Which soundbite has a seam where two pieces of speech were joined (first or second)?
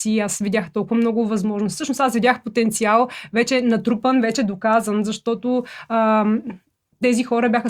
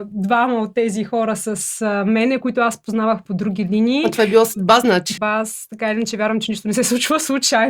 second